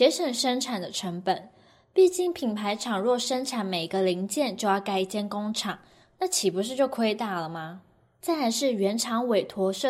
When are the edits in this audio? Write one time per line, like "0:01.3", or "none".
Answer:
none